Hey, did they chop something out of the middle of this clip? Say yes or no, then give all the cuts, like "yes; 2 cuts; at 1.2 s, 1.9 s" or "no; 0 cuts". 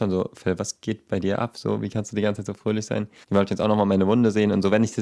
yes; 1 cut; at 3.2 s